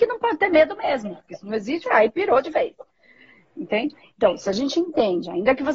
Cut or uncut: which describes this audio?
cut